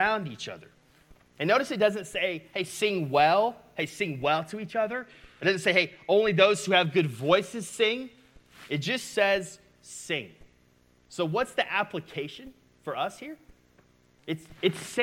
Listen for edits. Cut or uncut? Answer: uncut